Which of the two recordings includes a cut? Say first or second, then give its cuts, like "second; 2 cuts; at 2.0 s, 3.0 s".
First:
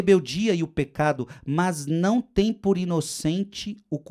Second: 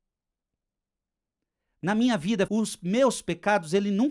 second; 1 cut; at 2.5 s